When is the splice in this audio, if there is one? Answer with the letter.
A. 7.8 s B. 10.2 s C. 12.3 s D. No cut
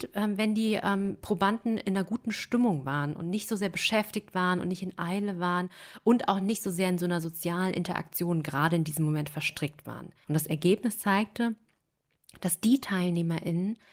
B